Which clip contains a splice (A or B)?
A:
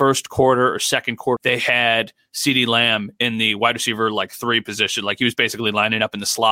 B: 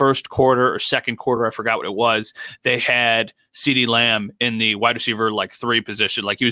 A